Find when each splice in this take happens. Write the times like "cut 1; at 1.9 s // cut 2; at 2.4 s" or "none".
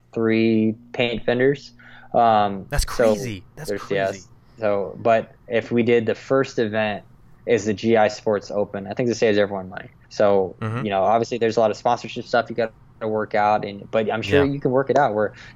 cut 1; at 10.0 s